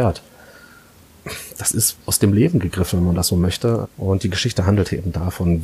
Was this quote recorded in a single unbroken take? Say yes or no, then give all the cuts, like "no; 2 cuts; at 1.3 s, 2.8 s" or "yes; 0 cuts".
no; 2 cuts; at 2.0 s, 3.8 s